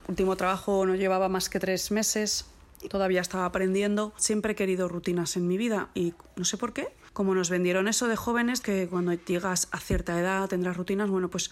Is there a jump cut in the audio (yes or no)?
yes